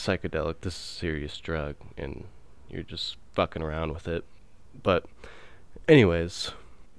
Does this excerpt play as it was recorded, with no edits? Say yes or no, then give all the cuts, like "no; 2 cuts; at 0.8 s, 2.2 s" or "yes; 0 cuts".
yes; 0 cuts